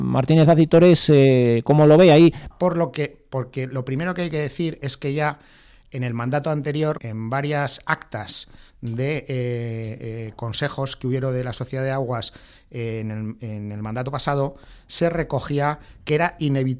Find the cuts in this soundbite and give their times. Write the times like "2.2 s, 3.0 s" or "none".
2.5 s, 7.0 s